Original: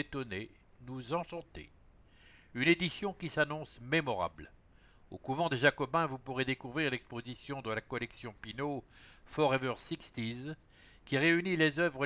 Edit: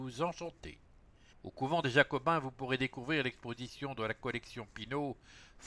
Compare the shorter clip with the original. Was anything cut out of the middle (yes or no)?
yes